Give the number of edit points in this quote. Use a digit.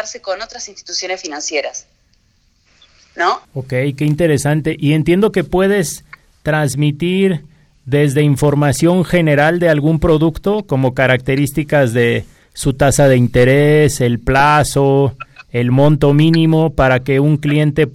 1